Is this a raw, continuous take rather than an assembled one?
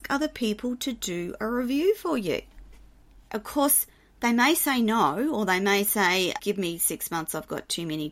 no; 2 cuts; at 3.3 s, 6.4 s

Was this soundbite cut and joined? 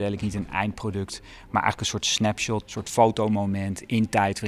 yes; 1 cut; at 2.6 s

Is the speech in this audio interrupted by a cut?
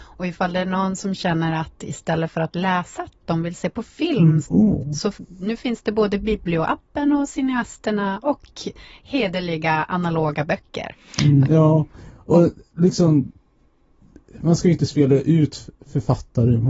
yes; 3 cuts; at 4.4 s, 11.4 s, 15.8 s

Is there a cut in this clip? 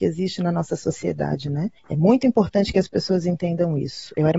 yes; 1 cut; at 1.8 s

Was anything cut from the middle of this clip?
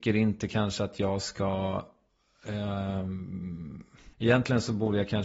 yes; 1 cut; at 4.1 s

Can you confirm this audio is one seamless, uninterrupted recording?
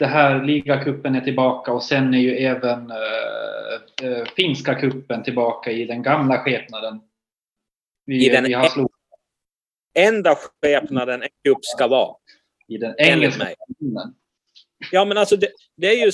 yes; 0 cuts

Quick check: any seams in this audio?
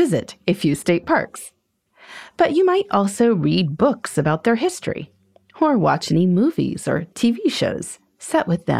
no; 0 cuts

